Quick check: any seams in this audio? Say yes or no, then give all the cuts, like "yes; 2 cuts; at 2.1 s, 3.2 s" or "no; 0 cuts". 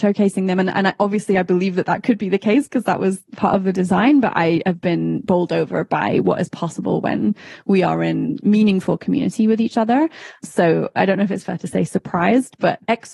no; 0 cuts